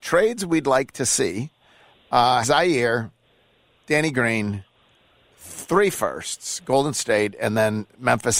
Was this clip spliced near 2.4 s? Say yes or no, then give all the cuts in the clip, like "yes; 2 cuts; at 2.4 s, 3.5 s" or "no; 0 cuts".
yes; 1 cut; at 2.4 s